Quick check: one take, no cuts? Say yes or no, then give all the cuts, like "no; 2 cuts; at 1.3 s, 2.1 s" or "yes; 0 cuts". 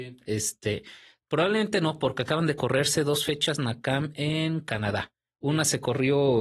yes; 0 cuts